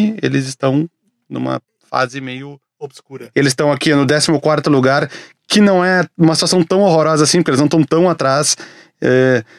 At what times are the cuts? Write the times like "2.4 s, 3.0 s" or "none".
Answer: 3.3 s